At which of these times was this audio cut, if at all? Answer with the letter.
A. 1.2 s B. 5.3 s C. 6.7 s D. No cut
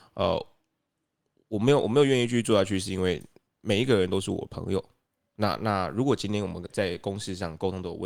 C